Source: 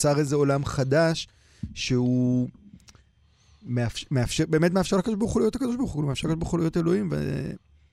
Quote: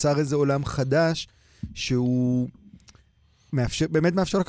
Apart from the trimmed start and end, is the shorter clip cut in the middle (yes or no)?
yes